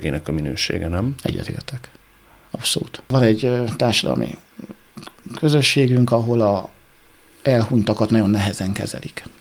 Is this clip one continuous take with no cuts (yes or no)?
yes